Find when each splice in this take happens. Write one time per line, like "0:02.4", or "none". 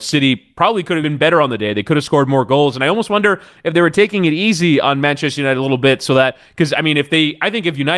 0:01.0